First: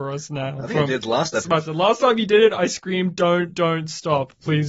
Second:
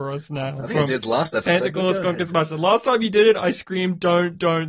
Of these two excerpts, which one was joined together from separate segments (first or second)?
first